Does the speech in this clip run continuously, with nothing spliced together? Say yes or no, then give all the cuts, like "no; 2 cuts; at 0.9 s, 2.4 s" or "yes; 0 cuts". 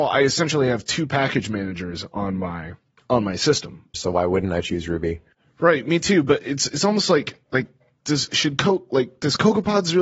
no; 1 cut; at 3.9 s